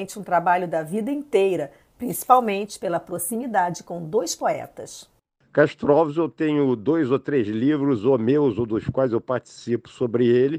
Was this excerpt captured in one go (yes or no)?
yes